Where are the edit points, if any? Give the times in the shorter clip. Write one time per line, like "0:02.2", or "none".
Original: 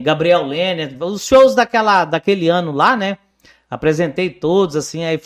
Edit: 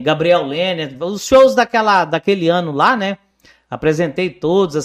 none

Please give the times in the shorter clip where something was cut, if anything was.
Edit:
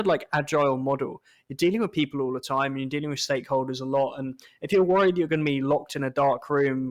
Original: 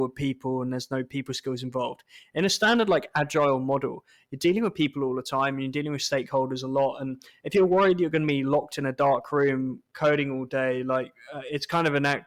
none

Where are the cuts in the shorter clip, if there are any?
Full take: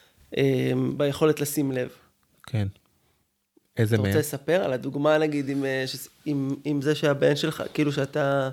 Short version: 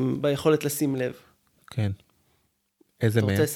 none

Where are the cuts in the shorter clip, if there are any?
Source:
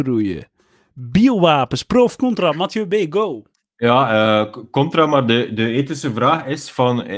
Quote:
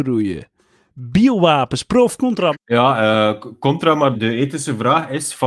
0:02.5
0:04.1

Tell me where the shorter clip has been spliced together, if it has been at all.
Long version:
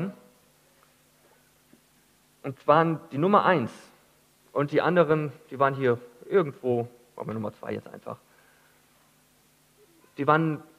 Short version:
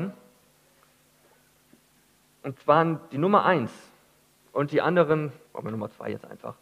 0:05.4

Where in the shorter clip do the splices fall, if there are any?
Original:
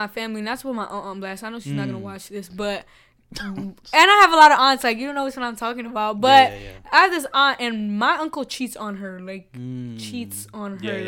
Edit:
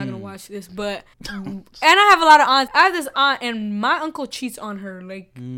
0:01.1
0:02.7

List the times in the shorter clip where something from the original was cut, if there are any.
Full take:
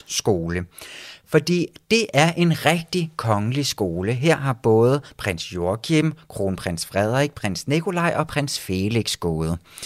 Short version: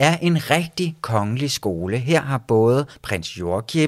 none

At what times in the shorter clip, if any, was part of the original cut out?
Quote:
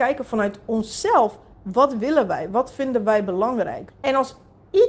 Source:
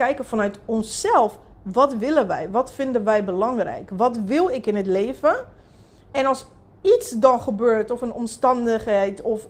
0:03.9

